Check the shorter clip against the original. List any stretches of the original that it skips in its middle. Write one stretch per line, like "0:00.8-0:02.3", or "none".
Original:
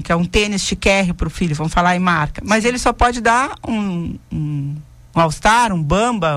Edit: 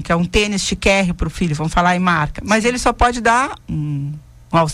0:03.6-0:04.2